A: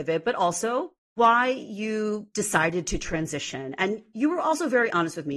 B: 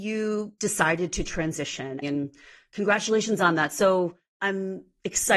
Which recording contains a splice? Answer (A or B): B